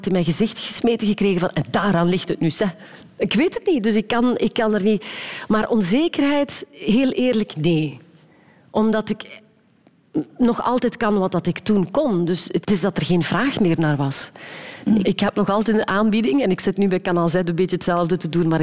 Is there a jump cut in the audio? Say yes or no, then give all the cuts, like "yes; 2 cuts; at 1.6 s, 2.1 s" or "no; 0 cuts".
yes; 2 cuts; at 12.6 s, 15.0 s